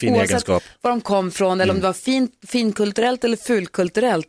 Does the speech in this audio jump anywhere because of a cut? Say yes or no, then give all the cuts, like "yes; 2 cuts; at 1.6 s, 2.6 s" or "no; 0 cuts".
no; 0 cuts